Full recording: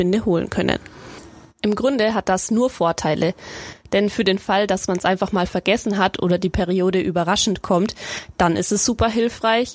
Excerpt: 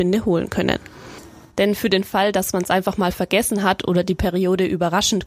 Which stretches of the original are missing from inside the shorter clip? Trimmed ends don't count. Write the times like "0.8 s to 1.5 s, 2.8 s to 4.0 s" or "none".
1.5 s to 3.9 s